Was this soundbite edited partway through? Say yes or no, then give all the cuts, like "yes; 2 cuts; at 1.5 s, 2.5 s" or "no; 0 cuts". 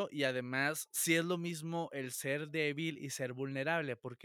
no; 0 cuts